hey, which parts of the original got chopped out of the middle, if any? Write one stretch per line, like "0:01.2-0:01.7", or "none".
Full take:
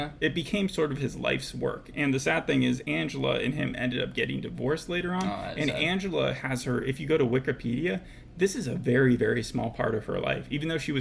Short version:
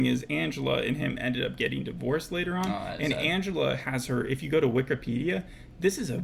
none

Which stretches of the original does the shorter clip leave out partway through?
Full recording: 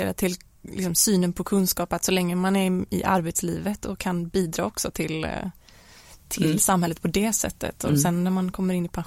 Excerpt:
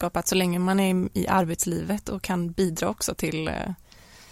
none

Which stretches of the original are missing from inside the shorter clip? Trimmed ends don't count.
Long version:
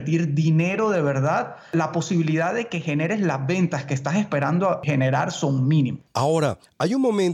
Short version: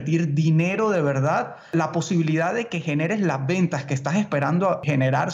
none

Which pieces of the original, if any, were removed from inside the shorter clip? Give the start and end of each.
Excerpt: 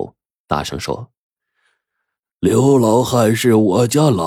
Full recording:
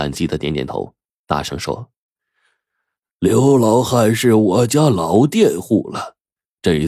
none

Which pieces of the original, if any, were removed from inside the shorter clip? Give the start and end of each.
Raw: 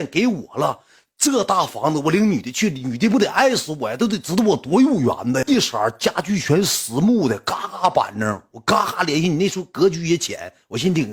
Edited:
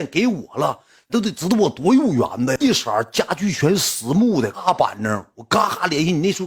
0:01.1-0:04.0
0:07.4-0:07.7

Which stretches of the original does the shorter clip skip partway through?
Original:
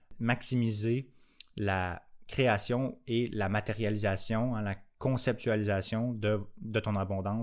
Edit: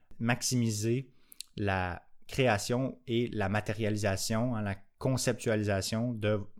none

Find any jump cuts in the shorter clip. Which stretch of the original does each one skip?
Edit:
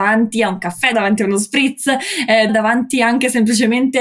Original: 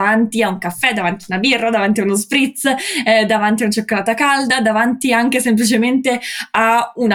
0:00.9-0:01.7
0:03.3-0:04.6

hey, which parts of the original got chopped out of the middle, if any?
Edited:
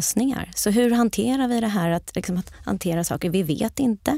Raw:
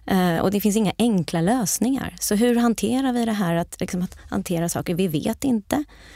none

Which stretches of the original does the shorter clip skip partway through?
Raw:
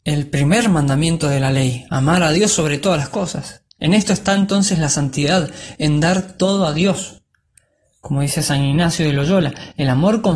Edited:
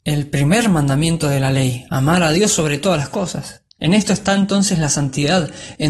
none

